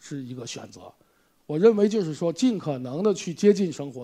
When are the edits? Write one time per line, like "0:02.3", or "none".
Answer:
none